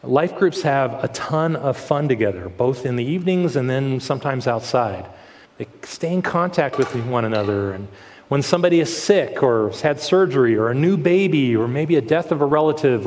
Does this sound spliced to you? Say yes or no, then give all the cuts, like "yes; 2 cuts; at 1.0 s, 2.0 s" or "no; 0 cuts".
yes; 1 cut; at 5.4 s